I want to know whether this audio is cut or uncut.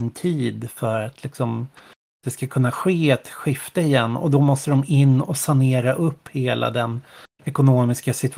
uncut